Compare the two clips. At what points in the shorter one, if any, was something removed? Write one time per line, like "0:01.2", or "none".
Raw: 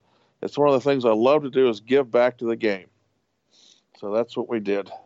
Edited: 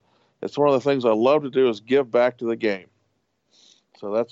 none